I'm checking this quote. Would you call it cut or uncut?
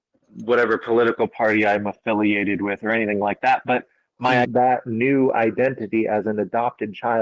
cut